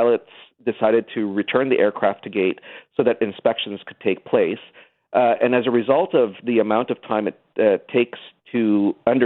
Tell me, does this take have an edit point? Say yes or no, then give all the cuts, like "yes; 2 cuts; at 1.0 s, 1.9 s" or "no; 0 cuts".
no; 0 cuts